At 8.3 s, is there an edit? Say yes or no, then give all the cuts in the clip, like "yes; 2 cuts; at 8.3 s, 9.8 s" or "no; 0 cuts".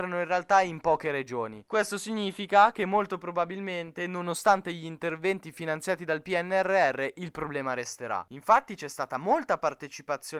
yes; 1 cut; at 8.3 s